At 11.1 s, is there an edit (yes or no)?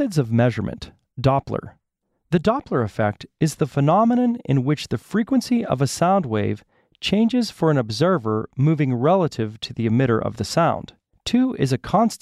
yes